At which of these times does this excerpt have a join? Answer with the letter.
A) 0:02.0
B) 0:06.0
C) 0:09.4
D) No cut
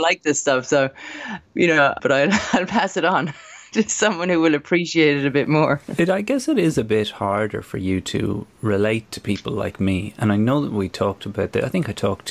A